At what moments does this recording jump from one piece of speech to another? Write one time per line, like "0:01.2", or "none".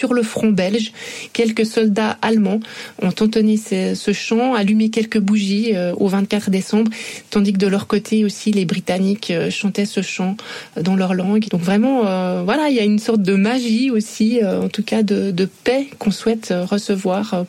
0:11.4

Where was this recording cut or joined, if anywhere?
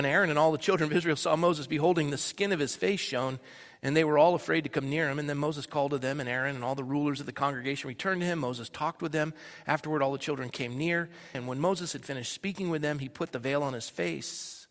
0:11.3

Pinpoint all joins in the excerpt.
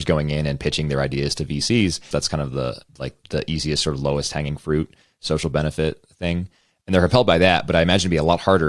0:02.1
0:03.2

